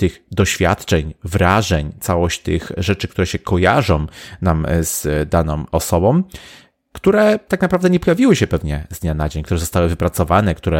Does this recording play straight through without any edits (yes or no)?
yes